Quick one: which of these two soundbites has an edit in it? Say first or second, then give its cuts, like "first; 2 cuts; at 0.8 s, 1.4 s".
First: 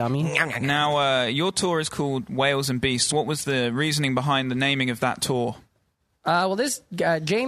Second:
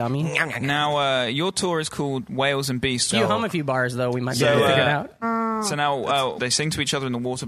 second; 3 cuts; at 3.1 s, 5.2 s, 6.4 s